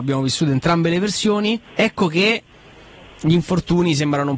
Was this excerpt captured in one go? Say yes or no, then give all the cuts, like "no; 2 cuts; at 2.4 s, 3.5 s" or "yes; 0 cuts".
no; 1 cut; at 1.7 s